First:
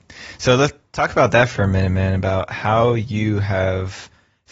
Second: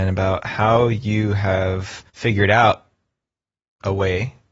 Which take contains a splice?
second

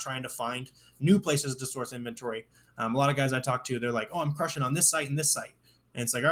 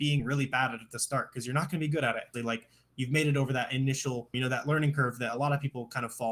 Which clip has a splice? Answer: second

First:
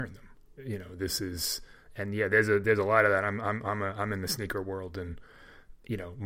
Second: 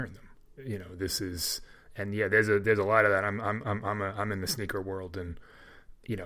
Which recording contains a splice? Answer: first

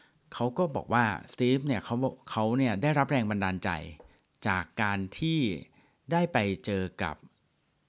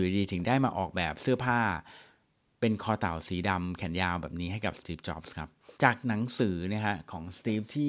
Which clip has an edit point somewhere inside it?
second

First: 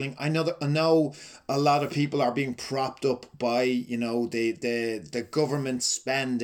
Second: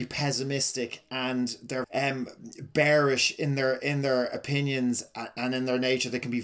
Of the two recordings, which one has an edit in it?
second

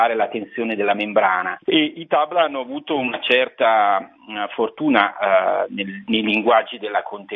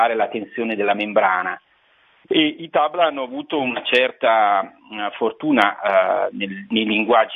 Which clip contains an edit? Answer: first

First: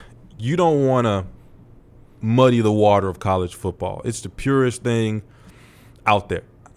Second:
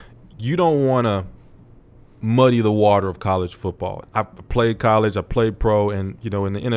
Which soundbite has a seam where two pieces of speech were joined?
second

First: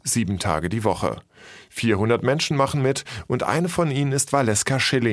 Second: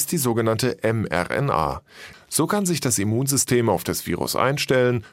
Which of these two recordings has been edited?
second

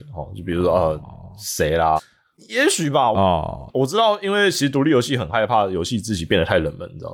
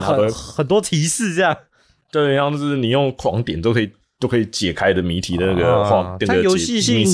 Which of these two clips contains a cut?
first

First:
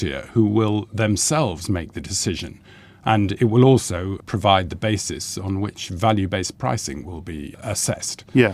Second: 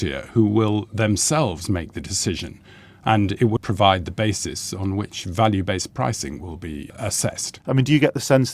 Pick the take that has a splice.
second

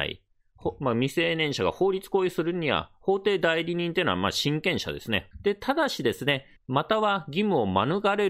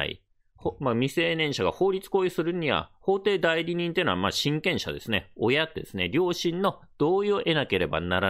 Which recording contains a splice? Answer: first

